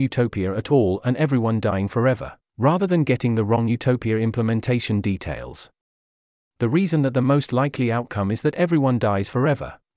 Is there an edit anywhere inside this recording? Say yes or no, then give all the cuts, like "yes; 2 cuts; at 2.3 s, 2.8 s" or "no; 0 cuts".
no; 0 cuts